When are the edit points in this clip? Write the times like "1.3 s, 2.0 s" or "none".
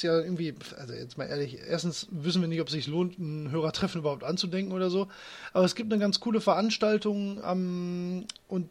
none